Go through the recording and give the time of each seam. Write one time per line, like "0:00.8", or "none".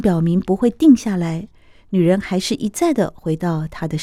none